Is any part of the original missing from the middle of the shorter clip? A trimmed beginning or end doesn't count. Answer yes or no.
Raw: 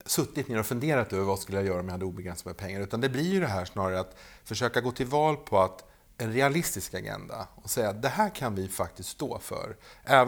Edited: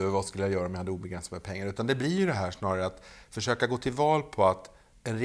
no